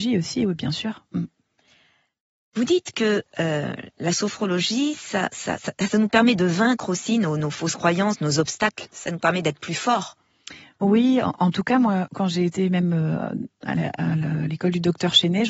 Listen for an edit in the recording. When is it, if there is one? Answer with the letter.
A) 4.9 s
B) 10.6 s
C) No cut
C